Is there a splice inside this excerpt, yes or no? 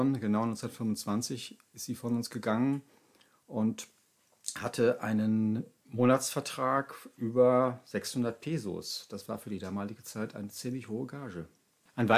no